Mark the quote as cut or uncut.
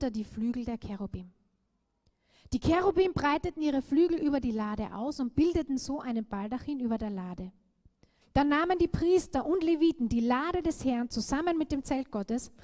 cut